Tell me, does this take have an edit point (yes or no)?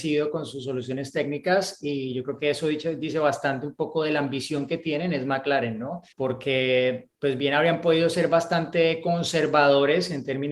yes